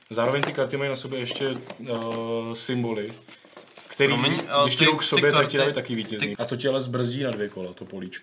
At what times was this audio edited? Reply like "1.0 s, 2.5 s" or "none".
6.3 s

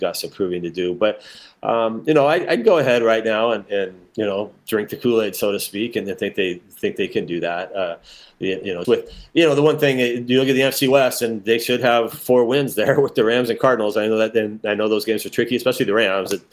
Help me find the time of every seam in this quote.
8.8 s

